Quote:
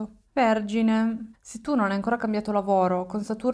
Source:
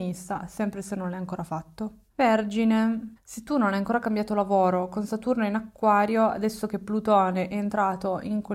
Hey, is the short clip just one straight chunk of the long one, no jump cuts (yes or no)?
yes